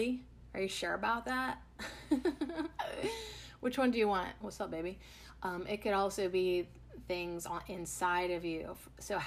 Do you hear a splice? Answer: yes; 1 cut; at 4.4 s

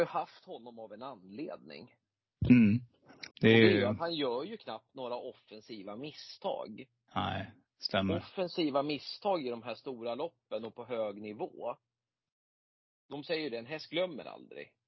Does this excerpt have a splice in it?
yes; 1 cut; at 3.3 s

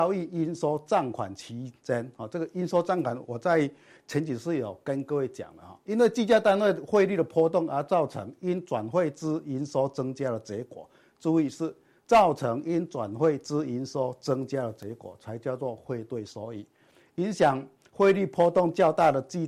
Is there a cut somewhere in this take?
no; 0 cuts

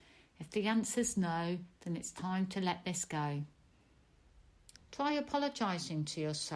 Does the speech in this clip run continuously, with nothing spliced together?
no; 1 cut; at 4.8 s

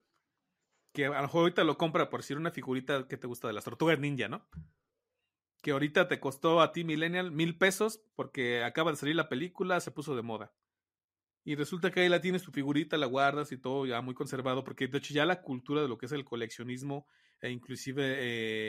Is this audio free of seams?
no; 1 cut; at 8.1 s

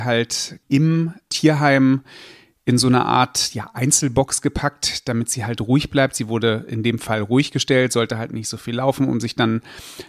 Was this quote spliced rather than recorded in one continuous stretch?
no; 0 cuts

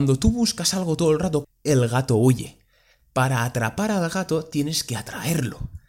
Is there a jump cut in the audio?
yes; 1 cut; at 1.4 s

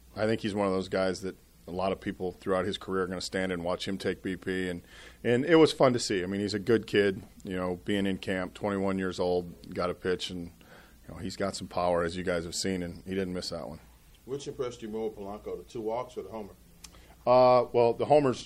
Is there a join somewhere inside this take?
no; 0 cuts

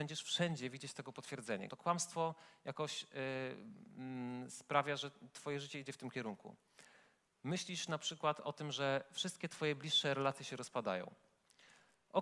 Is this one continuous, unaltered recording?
no; 1 cut; at 1.7 s

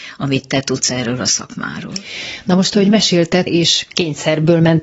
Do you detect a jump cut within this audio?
yes; 1 cut; at 3.5 s

